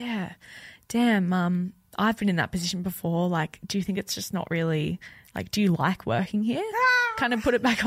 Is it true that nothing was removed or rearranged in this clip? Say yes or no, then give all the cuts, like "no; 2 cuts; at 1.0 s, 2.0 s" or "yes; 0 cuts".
yes; 0 cuts